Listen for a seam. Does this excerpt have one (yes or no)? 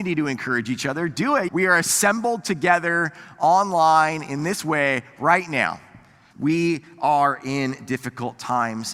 yes